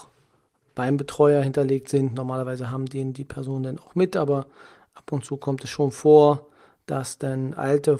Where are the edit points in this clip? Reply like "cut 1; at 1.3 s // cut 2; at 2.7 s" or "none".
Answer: none